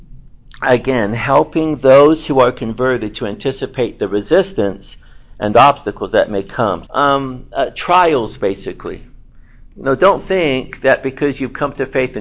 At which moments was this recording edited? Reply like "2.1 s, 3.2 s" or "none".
6.9 s